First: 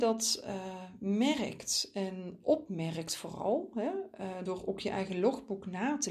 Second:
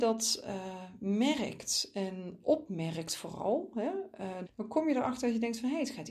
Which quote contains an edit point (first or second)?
second